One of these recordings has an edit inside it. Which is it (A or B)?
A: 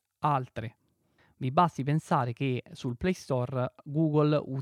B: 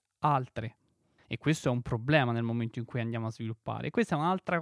B